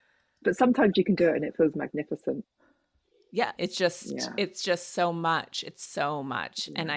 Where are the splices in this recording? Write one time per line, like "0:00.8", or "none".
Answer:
0:03.6